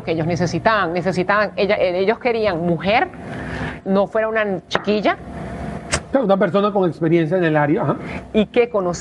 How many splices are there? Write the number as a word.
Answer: two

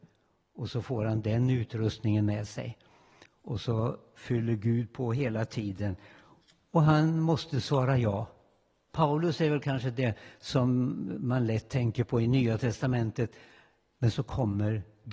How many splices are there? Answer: two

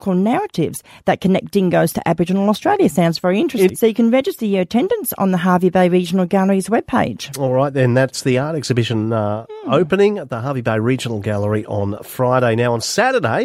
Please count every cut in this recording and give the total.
one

